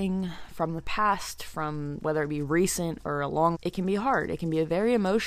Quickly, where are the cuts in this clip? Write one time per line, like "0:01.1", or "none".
0:02.0
0:03.5